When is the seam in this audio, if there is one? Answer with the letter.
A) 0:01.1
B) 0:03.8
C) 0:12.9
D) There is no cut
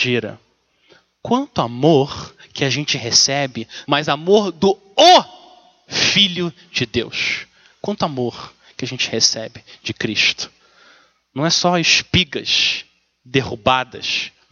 B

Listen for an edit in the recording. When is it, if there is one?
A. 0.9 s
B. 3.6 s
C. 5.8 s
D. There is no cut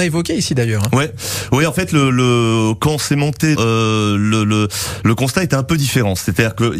B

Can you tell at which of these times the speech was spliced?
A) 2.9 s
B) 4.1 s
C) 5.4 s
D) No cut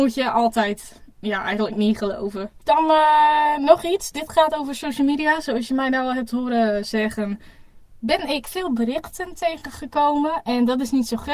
D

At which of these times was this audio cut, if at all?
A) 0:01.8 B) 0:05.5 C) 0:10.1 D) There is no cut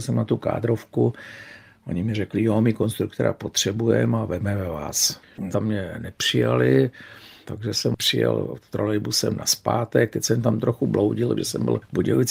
B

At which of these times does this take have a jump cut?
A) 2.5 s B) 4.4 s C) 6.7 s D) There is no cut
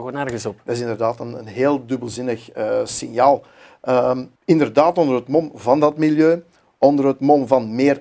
B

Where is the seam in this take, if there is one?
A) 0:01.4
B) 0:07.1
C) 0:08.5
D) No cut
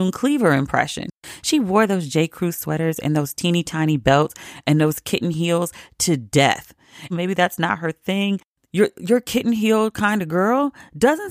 B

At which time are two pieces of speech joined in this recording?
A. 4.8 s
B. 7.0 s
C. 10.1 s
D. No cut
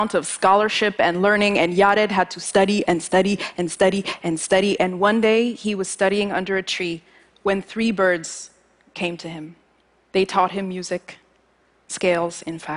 C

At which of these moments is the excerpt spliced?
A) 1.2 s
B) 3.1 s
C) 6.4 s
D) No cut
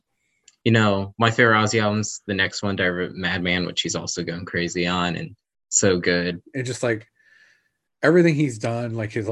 C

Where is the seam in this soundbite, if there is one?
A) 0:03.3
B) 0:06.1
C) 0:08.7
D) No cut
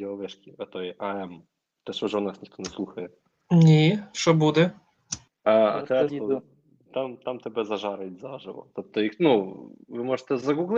B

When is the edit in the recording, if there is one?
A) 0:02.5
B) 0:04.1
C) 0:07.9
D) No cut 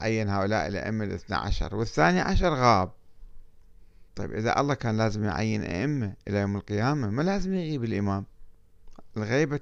B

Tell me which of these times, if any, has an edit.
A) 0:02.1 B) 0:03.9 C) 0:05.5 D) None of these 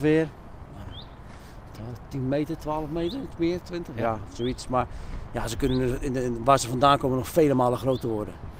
D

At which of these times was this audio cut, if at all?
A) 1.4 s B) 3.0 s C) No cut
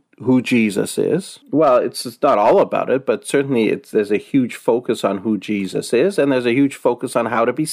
A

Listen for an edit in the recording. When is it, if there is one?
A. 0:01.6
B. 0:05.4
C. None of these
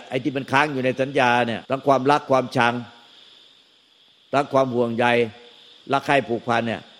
A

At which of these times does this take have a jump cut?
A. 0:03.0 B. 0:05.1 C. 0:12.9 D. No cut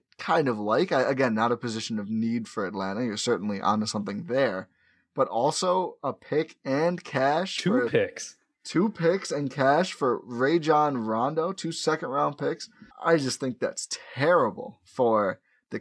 C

